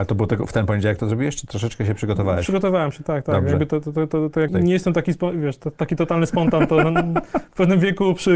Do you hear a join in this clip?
yes; 2 cuts; at 3.0 s, 4.5 s

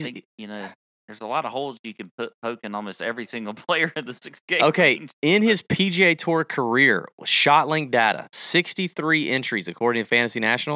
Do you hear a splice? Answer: no; 0 cuts

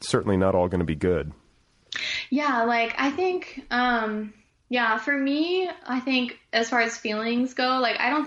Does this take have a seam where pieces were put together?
no; 0 cuts

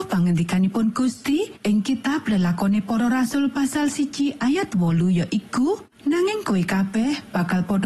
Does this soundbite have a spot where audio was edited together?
yes; 2 cuts; at 1.6 s, 5.9 s

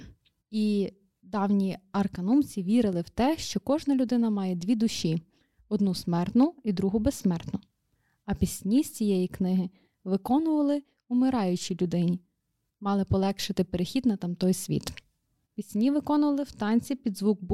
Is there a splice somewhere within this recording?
no; 0 cuts

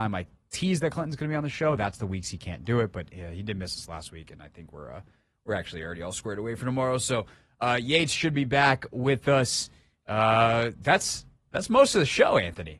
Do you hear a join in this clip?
no; 0 cuts

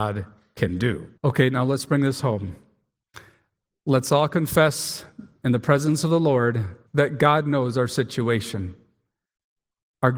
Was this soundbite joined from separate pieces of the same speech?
yes; 2 cuts; at 1.2 s, 6.9 s

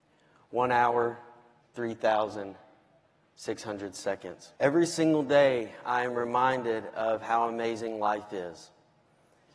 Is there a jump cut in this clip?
yes; 2 cuts; at 1.6 s, 4.6 s

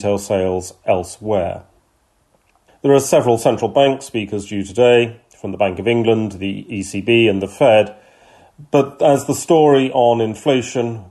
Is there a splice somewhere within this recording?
yes; 1 cut; at 2.7 s

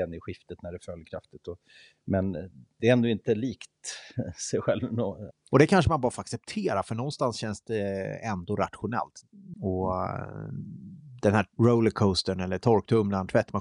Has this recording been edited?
yes; 2 cuts; at 5.3 s, 9.5 s

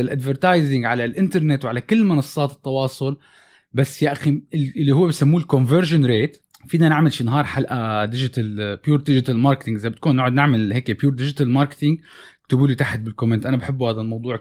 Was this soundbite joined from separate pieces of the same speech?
no; 0 cuts

